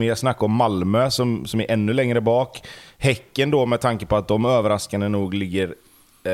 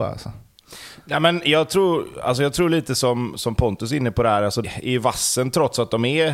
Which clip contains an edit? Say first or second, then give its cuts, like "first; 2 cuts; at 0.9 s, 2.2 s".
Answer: second; 1 cut; at 4.6 s